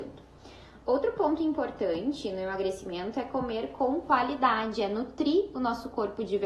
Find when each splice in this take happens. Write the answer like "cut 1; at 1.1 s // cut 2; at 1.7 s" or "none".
none